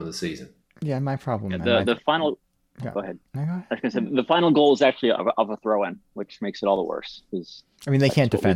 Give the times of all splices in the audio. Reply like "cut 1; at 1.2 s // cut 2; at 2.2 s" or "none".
cut 1; at 3.3 s